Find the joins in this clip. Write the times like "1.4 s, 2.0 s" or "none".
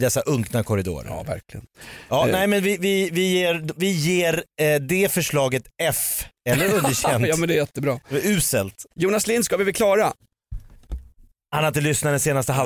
6.4 s